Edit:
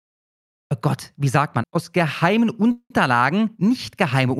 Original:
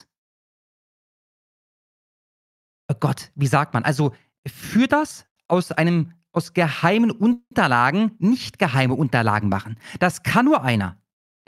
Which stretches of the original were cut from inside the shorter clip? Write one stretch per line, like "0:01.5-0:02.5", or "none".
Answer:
0:03.8-0:06.2

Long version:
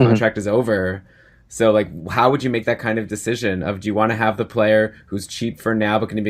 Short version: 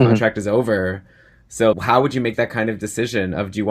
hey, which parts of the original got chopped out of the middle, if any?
0:01.7-0:02.0

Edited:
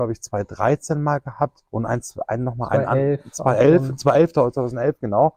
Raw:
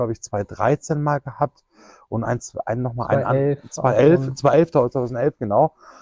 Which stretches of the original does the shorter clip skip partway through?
0:01.7-0:02.1

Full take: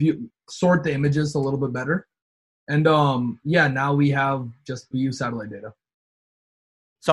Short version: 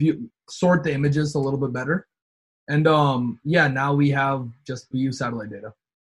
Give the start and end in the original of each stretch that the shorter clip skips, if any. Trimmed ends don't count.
none

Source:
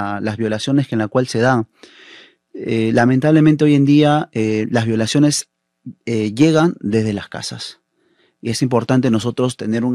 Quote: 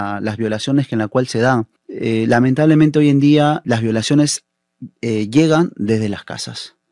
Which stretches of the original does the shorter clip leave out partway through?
0:01.8-0:02.4
0:04.3-0:04.7

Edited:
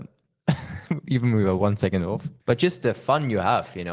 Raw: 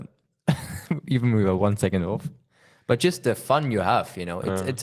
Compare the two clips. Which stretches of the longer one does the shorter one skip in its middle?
0:02.4-0:02.8

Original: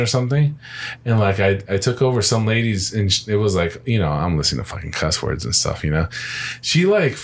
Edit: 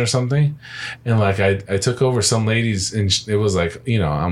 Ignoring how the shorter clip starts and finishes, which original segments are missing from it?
none

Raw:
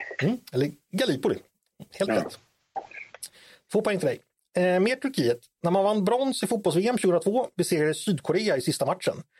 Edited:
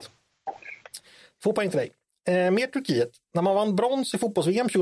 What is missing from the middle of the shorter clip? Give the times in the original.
none

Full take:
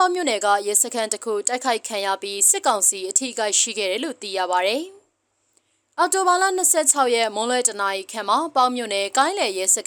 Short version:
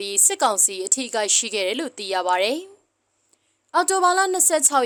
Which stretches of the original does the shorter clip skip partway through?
none

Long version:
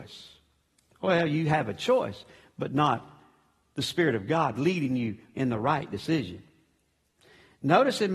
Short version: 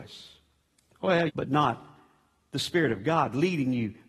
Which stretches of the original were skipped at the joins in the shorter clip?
0:01.3-0:02.5

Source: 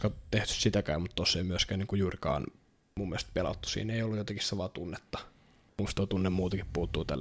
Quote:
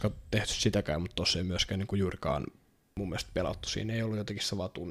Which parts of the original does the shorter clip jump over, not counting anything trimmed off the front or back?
none

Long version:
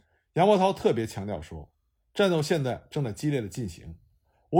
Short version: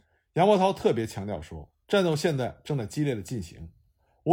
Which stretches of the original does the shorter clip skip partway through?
0:01.8-0:02.1

